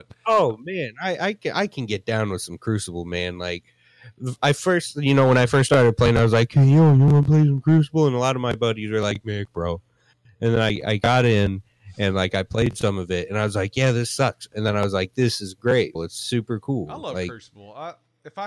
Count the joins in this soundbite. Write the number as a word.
three